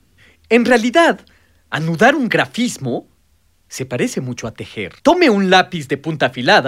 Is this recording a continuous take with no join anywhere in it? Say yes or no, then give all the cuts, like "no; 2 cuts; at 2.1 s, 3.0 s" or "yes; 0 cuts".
no; 1 cut; at 5.0 s